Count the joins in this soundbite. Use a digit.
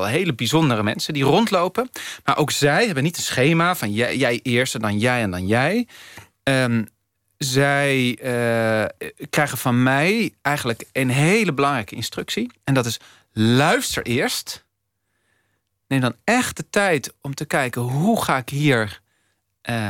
0